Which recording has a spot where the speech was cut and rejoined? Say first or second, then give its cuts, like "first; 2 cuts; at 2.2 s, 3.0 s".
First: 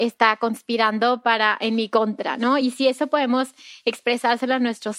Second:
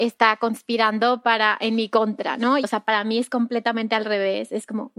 second; 1 cut; at 2.6 s